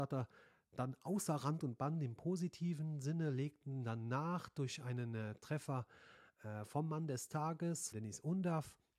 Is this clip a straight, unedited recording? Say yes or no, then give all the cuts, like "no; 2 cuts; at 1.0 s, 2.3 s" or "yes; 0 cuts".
no; 1 cut; at 7.9 s